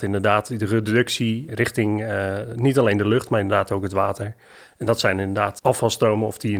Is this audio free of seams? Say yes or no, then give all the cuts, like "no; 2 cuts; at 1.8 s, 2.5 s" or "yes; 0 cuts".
no; 1 cut; at 1.5 s